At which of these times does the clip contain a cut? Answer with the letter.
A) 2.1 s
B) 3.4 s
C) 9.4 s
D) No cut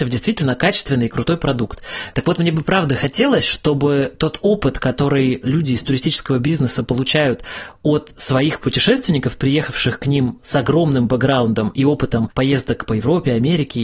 A